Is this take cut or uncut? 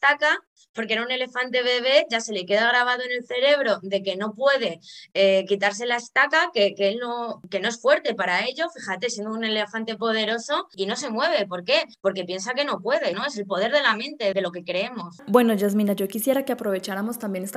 cut